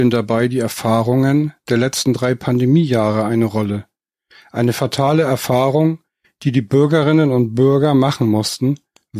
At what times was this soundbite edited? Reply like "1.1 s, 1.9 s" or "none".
none

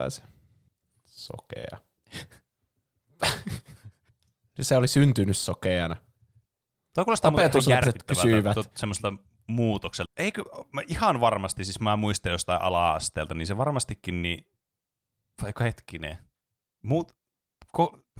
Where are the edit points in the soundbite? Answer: 10.1 s

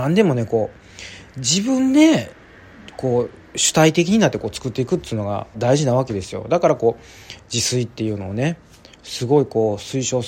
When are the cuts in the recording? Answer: 5.5 s

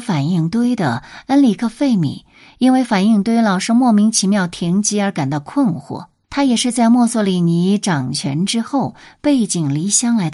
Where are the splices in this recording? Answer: 6.2 s

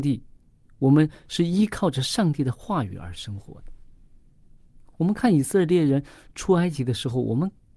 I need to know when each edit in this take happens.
none

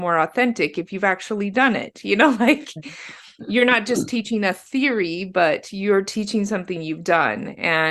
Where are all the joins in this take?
none

